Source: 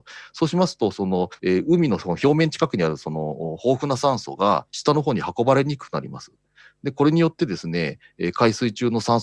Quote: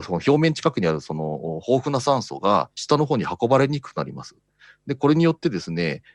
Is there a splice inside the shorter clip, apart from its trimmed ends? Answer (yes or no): no